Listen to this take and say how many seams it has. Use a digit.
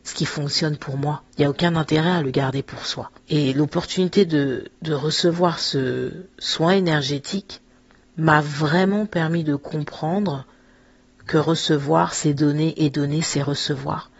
2